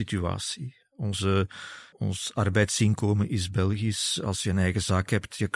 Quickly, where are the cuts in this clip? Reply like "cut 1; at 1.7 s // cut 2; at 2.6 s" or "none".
cut 1; at 1.9 s